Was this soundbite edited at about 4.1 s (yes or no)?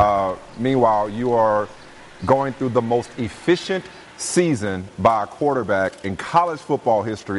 yes